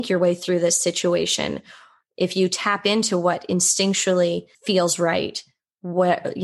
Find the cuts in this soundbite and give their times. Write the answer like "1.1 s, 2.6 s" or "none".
4.5 s